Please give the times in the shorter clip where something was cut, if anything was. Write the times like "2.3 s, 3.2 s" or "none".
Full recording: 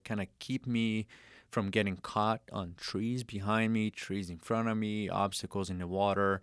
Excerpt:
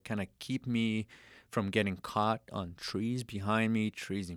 none